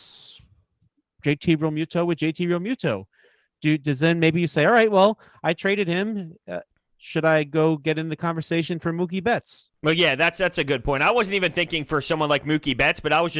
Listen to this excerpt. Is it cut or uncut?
uncut